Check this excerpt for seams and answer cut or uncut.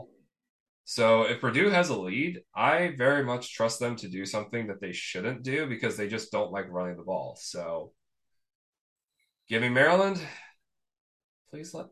uncut